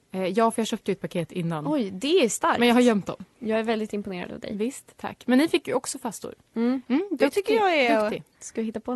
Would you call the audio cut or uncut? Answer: cut